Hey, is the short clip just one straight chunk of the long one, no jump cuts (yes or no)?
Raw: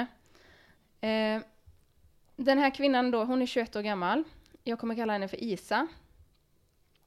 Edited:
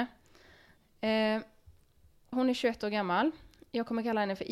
no